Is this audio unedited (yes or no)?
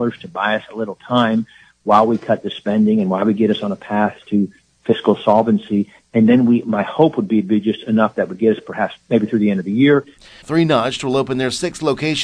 no